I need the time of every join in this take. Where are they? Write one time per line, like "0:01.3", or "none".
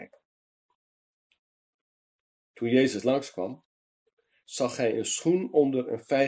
none